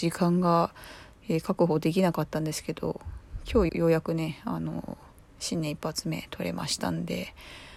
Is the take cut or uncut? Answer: cut